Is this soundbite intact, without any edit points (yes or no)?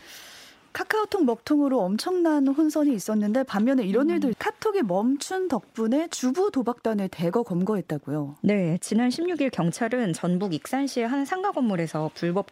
no